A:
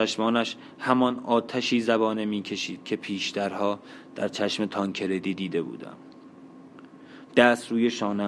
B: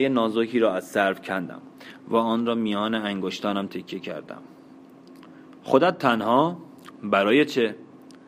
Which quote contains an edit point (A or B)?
B